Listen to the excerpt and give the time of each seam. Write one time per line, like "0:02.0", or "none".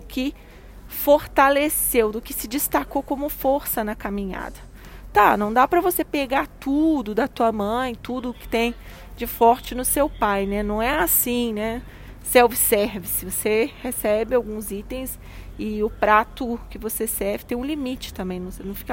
none